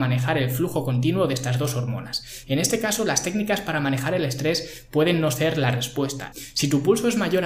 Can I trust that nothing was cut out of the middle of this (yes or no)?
no